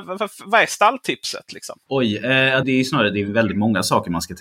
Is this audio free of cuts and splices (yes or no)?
no